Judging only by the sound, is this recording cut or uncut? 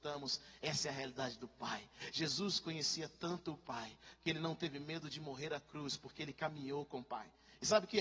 uncut